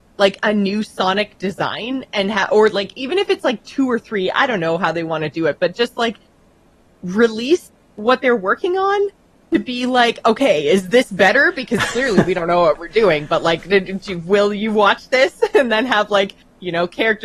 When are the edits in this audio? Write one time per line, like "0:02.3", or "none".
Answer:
none